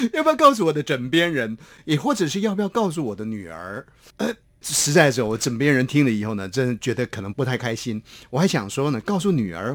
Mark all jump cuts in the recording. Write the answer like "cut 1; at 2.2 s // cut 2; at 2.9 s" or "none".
cut 1; at 7.3 s